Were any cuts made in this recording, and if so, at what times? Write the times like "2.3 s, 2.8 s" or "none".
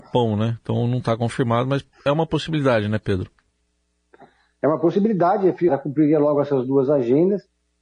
5.7 s